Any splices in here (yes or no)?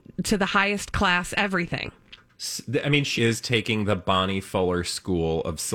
yes